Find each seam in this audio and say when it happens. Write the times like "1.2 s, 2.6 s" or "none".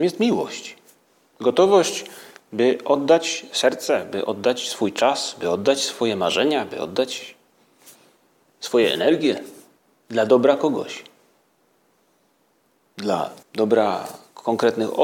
13.4 s